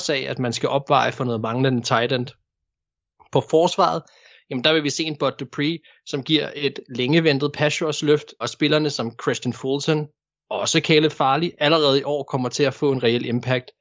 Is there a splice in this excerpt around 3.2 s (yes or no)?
no